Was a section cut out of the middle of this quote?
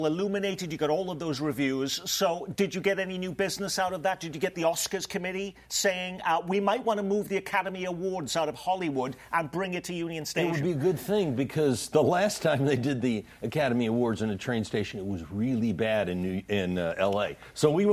yes; 1 cut; at 4.5 s

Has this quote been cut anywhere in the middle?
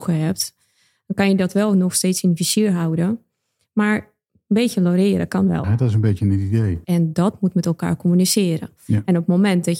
yes; 2 cuts; at 5.6 s, 6.8 s

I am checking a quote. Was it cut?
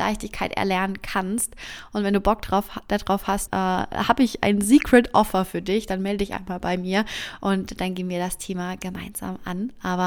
yes; 1 cut; at 3.5 s

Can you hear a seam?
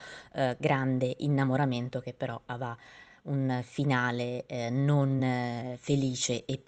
no; 0 cuts

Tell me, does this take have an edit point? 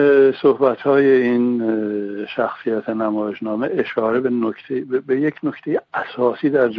no; 0 cuts

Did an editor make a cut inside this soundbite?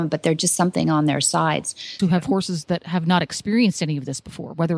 yes; 1 cut; at 2.0 s

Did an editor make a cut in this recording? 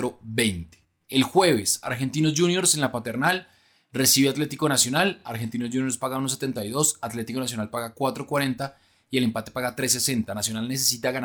no; 0 cuts

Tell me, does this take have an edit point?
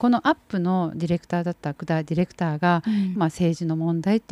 yes; 1 cut; at 3.1 s

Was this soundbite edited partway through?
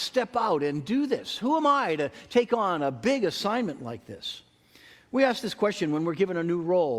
no; 0 cuts

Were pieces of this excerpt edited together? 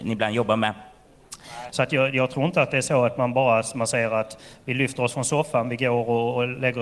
yes; 1 cut; at 1.7 s

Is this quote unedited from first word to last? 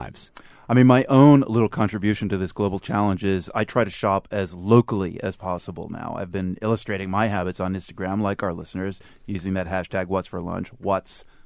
yes; 0 cuts

